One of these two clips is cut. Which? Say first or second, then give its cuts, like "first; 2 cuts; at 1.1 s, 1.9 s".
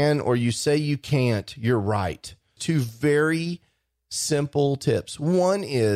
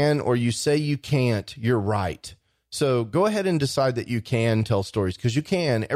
first; 1 cut; at 2.6 s